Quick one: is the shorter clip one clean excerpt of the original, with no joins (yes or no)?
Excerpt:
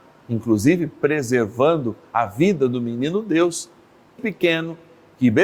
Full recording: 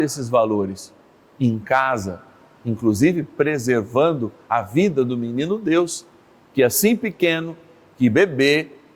no